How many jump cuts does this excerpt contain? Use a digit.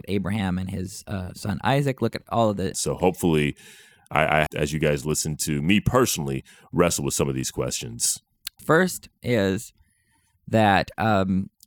3